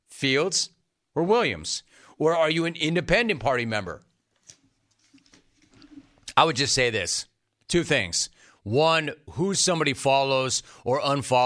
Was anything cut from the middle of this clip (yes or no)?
no